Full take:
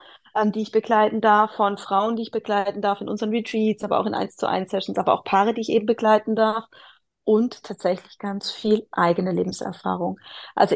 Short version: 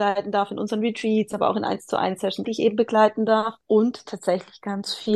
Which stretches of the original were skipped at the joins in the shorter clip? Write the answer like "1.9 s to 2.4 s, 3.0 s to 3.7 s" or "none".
4.9 s to 5.5 s, 6.7 s to 7.2 s